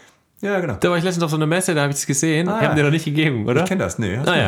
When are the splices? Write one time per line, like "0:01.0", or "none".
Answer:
0:02.6